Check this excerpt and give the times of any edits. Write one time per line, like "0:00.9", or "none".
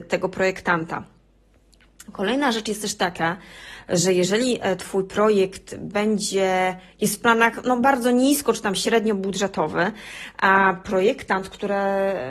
none